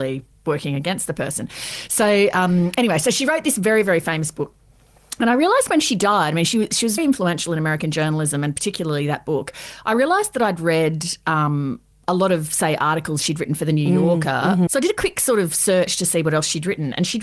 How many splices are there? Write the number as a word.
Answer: two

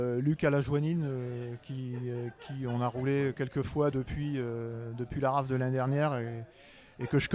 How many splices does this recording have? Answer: zero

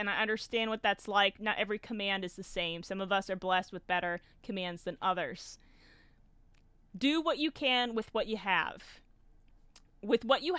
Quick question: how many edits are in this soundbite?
zero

